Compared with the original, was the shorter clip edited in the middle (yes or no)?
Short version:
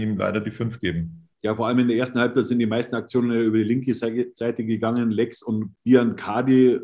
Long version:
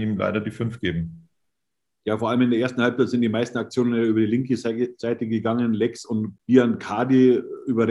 yes